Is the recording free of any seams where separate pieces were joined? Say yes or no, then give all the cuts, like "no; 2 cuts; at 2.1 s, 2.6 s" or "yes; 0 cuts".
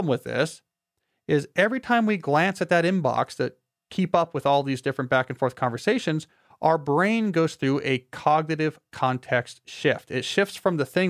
yes; 0 cuts